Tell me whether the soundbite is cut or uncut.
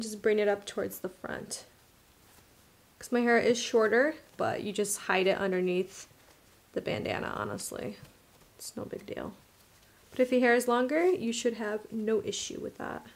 cut